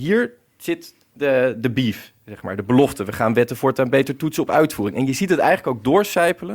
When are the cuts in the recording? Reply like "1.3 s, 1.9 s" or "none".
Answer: none